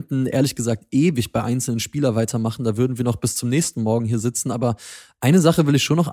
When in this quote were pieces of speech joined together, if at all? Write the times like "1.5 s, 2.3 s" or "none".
none